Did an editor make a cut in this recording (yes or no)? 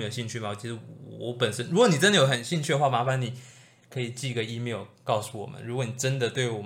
no